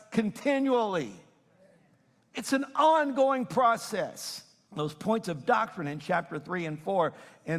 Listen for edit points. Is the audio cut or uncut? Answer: cut